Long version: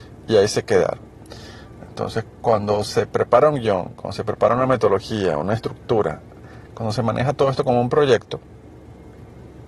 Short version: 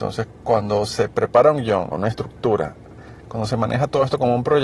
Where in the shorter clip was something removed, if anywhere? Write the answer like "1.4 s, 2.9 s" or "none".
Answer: 1.9 s